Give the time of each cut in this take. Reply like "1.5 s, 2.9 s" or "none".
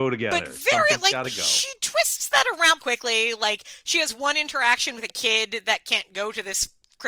2.8 s

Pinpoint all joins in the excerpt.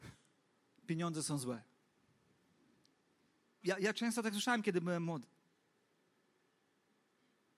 3.6 s

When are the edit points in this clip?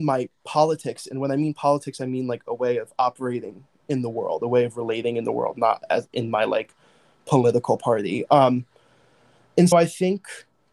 8.3 s, 9.7 s

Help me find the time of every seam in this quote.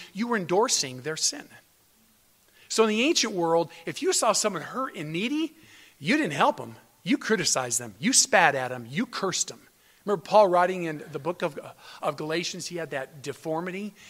none

